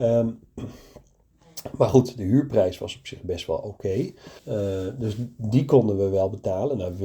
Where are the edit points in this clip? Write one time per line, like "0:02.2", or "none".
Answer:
0:04.4

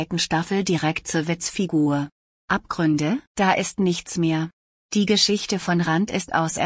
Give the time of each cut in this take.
0:03.3

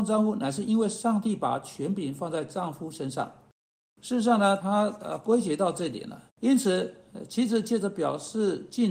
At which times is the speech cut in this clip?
0:04.6
0:06.3

